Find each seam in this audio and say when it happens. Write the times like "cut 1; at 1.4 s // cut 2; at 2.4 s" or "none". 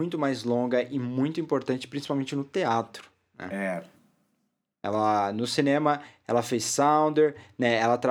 none